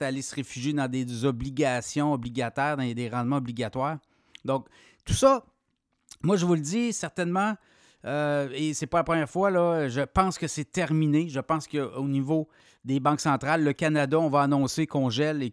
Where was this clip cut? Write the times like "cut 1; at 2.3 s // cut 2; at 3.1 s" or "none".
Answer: none